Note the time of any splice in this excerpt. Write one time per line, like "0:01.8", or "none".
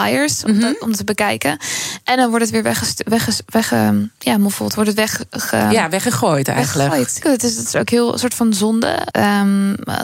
0:07.2
0:09.1